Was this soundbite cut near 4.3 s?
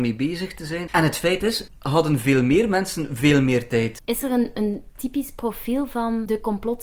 no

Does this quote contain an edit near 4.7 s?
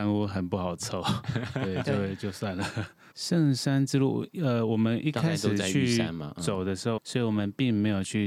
no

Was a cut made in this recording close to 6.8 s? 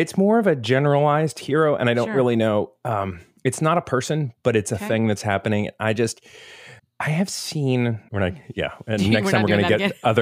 yes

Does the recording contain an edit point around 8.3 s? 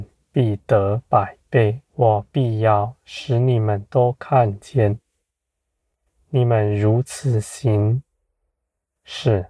no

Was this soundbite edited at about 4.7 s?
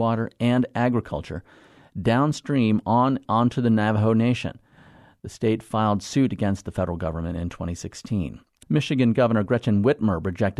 no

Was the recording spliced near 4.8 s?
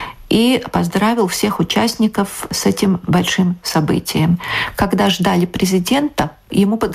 no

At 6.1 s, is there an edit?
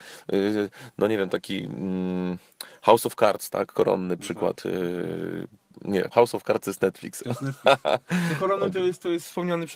yes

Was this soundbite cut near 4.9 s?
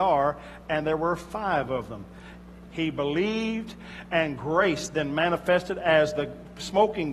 no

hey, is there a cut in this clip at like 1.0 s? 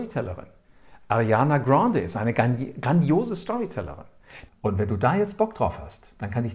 no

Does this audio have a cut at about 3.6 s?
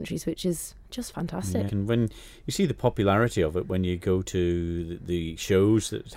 no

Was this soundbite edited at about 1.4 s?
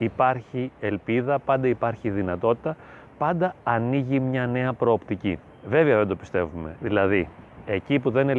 no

